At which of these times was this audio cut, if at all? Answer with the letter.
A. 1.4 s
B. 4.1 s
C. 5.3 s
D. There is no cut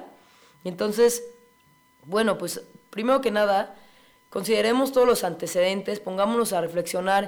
D